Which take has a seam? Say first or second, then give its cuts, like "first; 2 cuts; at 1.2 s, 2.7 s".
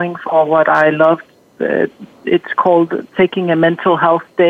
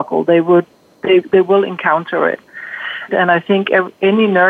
second; 1 cut; at 3.1 s